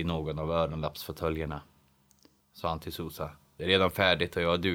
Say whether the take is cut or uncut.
cut